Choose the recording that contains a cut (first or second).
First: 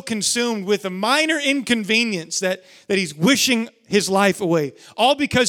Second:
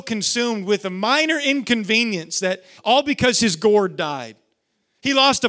second